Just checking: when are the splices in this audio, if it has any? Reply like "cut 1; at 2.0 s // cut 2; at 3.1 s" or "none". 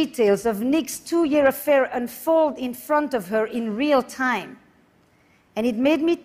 none